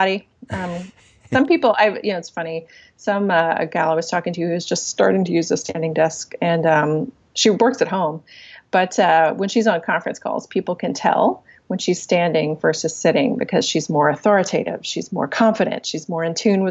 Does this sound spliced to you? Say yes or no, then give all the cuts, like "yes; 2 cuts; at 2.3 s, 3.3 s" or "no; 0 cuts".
no; 0 cuts